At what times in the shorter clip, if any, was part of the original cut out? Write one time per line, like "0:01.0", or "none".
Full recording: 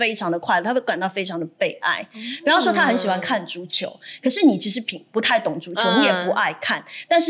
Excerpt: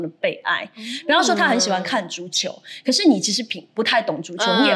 none